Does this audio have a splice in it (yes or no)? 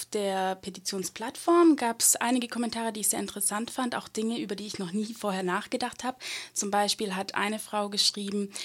no